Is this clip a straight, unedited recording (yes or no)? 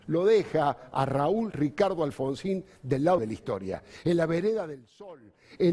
no